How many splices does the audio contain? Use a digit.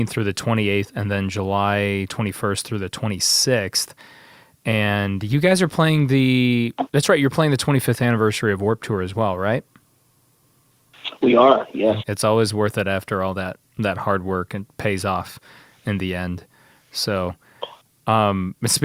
1